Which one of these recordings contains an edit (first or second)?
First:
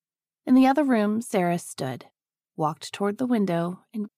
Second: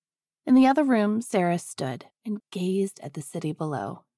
second